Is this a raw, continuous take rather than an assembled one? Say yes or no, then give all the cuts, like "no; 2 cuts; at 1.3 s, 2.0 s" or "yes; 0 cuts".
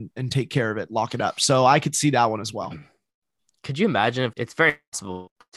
no; 1 cut; at 4.3 s